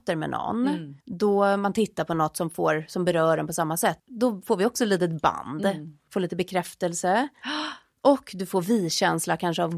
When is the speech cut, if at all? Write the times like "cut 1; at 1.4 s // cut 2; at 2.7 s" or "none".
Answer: cut 1; at 1.0 s // cut 2; at 4.0 s // cut 3; at 6.1 s